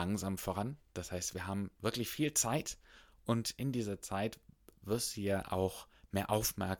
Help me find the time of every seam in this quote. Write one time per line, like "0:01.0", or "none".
0:04.8